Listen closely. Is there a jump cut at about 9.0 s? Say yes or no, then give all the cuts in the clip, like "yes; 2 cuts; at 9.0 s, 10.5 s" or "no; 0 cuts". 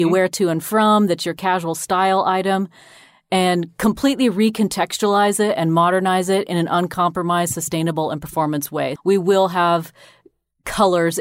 yes; 1 cut; at 9.0 s